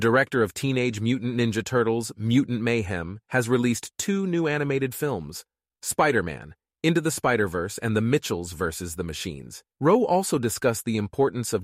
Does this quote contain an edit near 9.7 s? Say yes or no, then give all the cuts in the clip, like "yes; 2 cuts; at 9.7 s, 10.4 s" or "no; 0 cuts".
yes; 1 cut; at 9.7 s